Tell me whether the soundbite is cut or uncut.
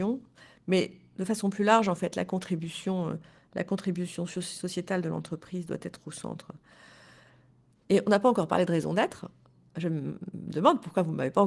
uncut